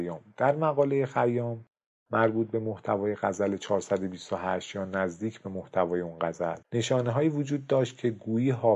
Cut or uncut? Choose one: cut